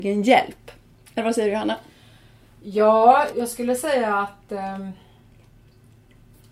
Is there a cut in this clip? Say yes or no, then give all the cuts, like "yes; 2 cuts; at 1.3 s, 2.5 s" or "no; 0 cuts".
yes; 1 cut; at 3.3 s